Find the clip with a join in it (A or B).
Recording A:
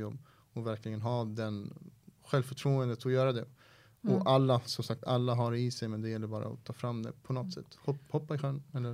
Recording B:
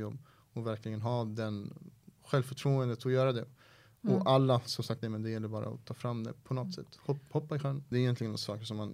B